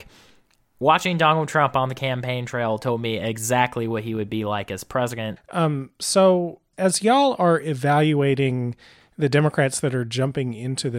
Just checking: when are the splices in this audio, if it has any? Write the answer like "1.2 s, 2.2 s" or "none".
5.4 s, 6.7 s